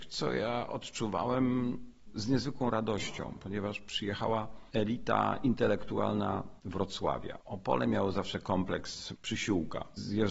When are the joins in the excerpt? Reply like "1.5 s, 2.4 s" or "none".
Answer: none